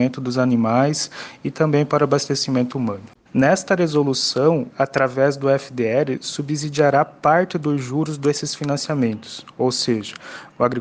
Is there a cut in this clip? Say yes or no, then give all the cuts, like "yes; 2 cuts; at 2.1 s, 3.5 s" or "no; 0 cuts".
yes; 2 cuts; at 3.3 s, 4.7 s